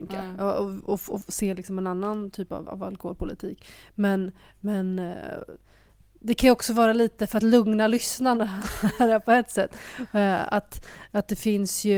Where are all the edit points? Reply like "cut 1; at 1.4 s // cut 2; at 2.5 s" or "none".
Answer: cut 1; at 2.7 s

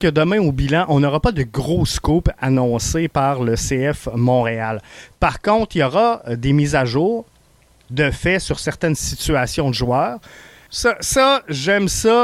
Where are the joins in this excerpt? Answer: cut 1; at 10.7 s

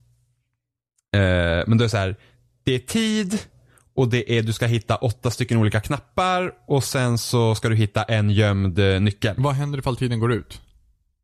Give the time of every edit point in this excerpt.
none

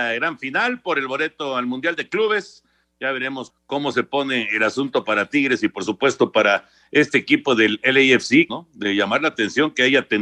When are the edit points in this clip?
cut 1; at 3.5 s // cut 2; at 8.5 s

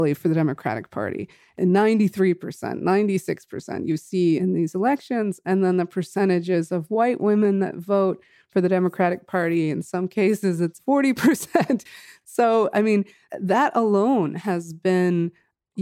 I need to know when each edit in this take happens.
none

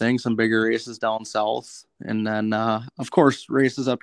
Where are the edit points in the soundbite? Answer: none

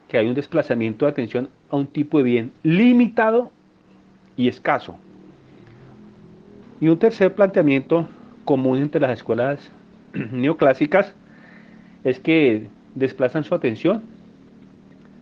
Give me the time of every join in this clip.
cut 1; at 6.6 s

